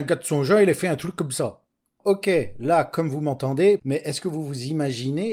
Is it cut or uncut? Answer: cut